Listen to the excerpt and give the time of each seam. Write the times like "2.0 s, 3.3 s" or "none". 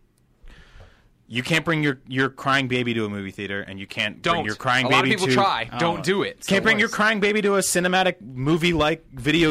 none